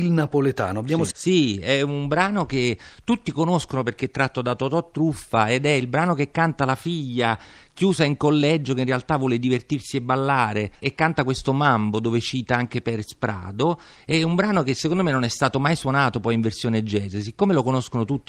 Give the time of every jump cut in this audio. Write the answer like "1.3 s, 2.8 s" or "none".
1.1 s